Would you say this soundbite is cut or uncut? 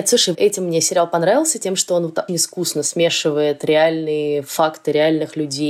cut